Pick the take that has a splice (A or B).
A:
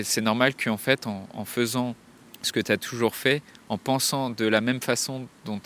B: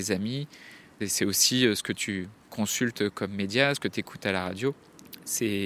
B